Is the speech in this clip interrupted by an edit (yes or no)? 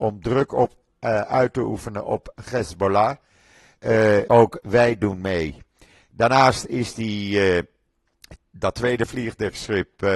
yes